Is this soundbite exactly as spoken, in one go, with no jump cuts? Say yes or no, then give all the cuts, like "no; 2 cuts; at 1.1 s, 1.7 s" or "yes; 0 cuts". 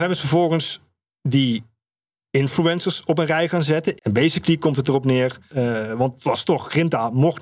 no; 2 cuts; at 4.0 s, 5.5 s